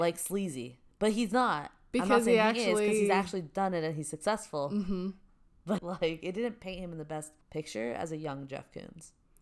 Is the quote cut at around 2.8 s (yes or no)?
no